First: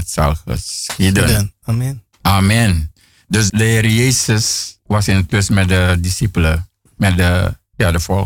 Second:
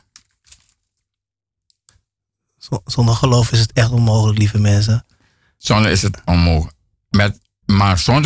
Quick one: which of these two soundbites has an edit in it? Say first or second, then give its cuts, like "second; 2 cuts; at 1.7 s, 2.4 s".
first; 1 cut; at 3.5 s